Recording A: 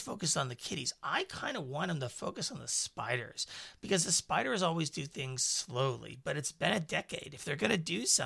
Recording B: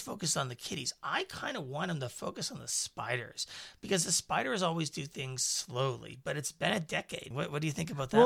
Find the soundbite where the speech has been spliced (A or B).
B